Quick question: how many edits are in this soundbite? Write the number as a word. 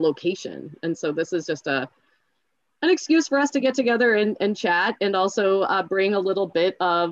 zero